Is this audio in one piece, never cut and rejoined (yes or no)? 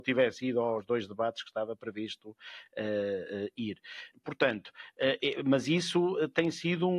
yes